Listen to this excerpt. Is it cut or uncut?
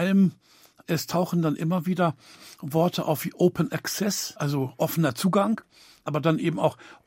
uncut